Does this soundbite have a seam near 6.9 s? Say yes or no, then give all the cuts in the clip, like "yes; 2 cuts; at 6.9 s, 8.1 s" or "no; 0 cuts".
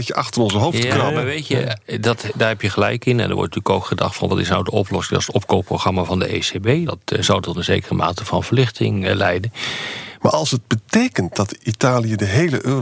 yes; 2 cuts; at 6.9 s, 10.2 s